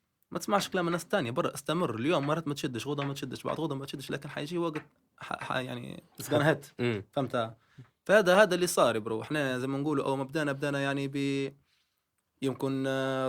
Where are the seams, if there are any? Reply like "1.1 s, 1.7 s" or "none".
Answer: 6.1 s